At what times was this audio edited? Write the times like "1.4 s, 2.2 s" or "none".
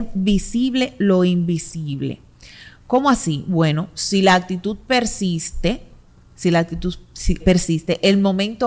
7.4 s